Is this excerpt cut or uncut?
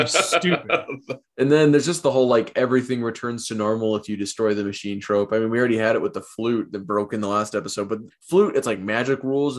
cut